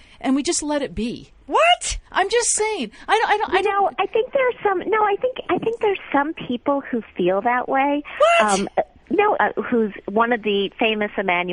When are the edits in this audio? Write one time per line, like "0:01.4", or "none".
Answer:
0:09.3